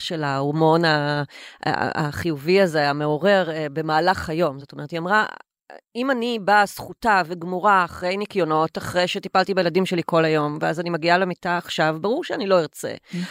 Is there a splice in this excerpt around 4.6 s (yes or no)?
no